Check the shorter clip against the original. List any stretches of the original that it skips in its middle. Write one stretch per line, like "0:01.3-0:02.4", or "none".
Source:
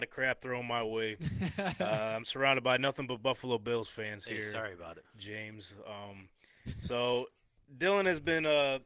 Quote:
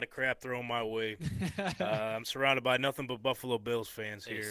none